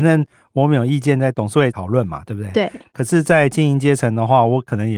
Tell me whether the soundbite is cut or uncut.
uncut